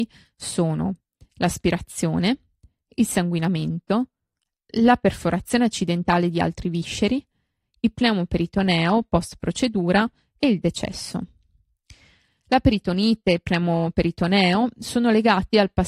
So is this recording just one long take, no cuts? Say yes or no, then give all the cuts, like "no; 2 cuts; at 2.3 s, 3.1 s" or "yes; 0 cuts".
yes; 0 cuts